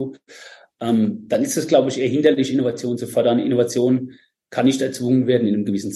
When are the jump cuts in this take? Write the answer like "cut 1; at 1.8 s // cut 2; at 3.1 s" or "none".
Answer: none